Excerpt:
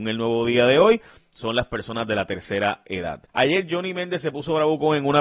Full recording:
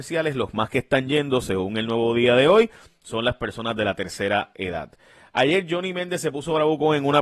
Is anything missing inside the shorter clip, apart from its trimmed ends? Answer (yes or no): yes